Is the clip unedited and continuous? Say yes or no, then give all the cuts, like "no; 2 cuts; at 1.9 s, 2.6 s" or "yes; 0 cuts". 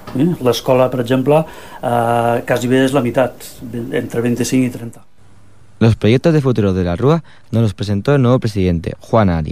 yes; 0 cuts